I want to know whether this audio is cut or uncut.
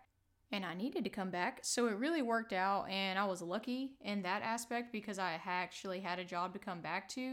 uncut